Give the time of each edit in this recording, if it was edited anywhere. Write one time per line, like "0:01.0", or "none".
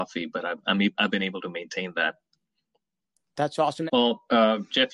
0:03.9